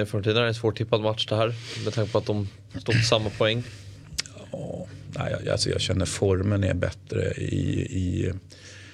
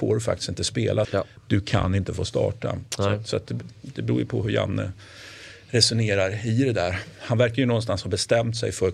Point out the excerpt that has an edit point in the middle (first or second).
second